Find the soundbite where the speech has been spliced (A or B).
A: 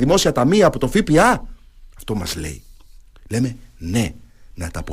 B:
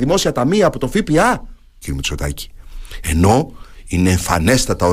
B